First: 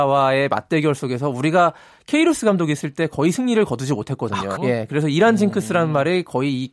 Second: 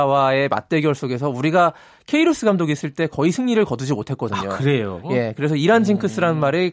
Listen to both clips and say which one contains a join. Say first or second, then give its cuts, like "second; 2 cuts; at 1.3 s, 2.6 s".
first; 1 cut; at 4.6 s